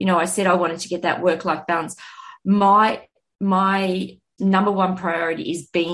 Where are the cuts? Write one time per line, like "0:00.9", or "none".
0:04.4